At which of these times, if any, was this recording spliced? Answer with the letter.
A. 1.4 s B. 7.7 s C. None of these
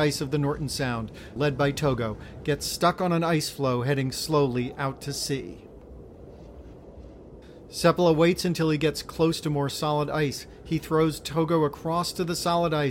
A